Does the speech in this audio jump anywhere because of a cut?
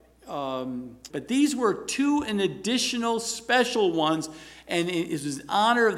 yes; 1 cut; at 1.1 s

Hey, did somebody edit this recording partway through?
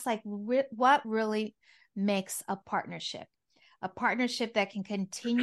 no; 0 cuts

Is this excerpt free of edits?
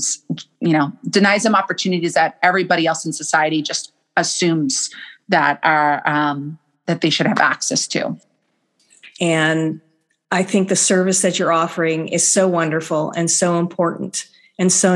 no; 1 cut; at 9.2 s

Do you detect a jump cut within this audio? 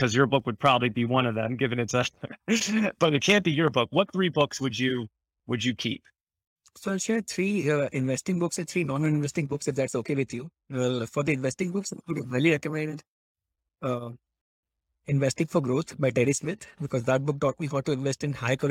no; 0 cuts

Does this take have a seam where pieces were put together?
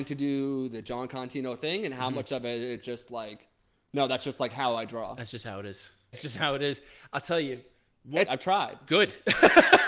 yes; 2 cuts; at 6.1 s, 8.2 s

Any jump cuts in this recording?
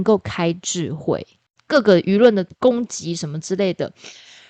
yes; 1 cut; at 1.6 s

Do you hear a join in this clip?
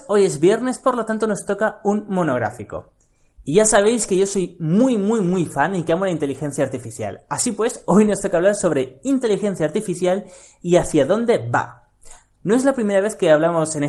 no; 0 cuts

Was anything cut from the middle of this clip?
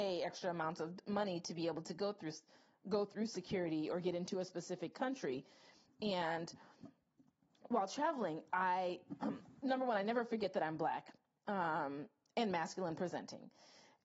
no; 0 cuts

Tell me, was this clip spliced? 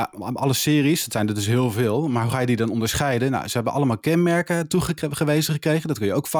no; 0 cuts

